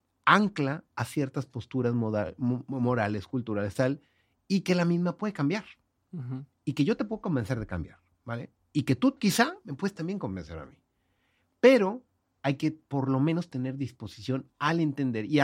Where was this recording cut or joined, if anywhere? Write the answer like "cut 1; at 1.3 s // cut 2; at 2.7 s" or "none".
none